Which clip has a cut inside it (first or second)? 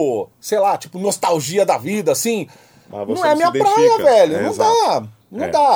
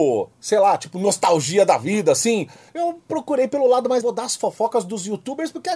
second